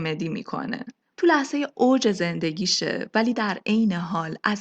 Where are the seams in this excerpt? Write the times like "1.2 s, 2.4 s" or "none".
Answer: 1.1 s